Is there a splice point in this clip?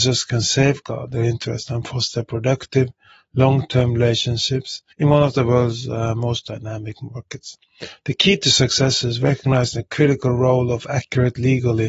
yes; 2 cuts; at 4.9 s, 8.0 s

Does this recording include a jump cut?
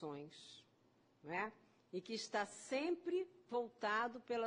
no; 0 cuts

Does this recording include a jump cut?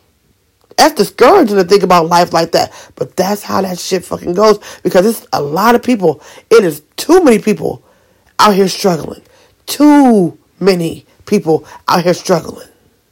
no; 0 cuts

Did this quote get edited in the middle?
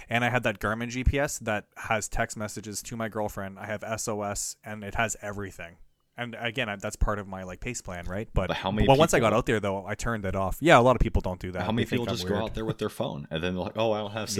no; 0 cuts

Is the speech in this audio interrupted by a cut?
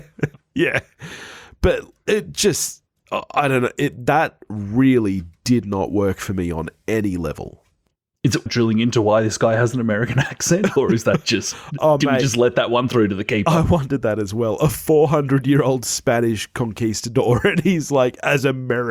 yes; 1 cut; at 8.5 s

